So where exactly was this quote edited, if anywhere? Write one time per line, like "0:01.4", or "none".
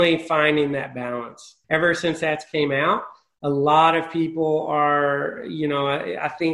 0:01.6